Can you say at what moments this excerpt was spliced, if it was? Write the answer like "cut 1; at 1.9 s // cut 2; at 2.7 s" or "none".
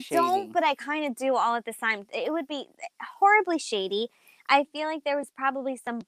none